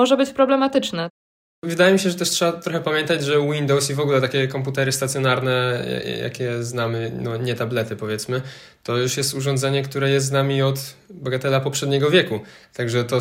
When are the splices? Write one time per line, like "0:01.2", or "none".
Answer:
none